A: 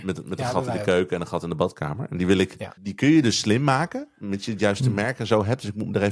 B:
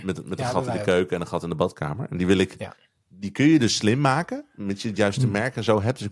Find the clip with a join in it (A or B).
A